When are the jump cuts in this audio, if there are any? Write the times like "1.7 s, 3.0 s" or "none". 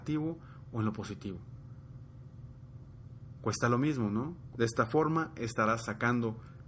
4.5 s